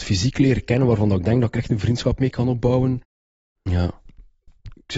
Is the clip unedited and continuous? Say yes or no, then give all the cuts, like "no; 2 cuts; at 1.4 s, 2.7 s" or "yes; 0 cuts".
no; 1 cut; at 3.6 s